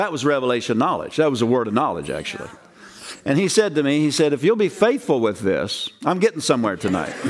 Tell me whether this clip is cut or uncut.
uncut